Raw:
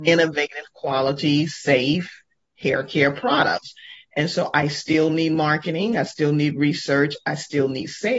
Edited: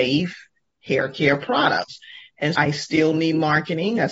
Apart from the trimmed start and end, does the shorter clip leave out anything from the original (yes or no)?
yes